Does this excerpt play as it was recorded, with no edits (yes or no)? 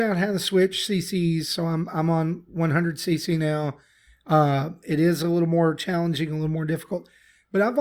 yes